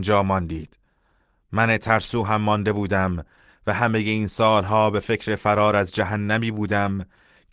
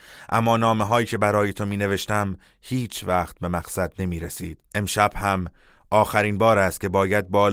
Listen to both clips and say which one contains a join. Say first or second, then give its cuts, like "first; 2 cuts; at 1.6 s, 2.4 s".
second; 1 cut; at 4.7 s